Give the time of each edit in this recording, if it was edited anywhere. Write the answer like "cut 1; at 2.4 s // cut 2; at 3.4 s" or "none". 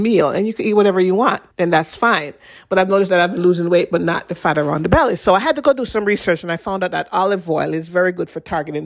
cut 1; at 1.5 s